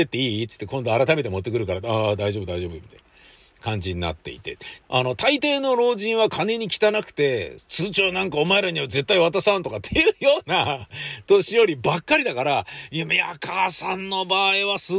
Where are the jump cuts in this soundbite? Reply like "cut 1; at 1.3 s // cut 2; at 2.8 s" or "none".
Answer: cut 1; at 4.8 s